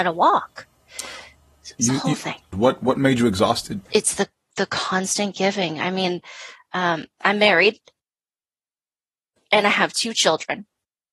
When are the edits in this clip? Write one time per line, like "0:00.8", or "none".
0:02.5
0:03.9